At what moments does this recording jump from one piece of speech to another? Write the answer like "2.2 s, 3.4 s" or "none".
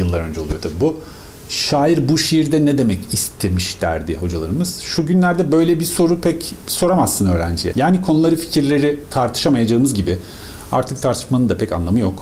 7.7 s